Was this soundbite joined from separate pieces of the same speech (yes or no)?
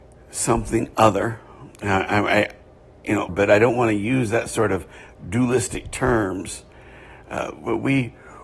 yes